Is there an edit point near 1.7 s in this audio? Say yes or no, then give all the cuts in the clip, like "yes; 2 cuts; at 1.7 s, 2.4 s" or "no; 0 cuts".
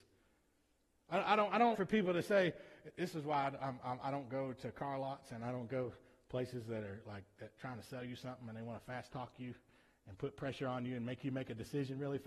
yes; 1 cut; at 1.7 s